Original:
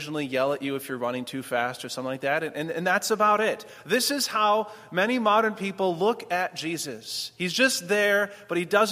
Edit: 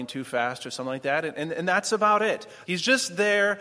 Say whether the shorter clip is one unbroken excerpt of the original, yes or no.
no